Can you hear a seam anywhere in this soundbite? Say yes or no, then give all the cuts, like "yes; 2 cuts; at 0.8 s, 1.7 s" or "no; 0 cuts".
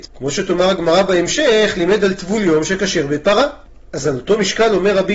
no; 0 cuts